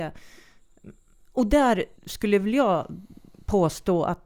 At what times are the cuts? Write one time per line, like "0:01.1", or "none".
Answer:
0:02.0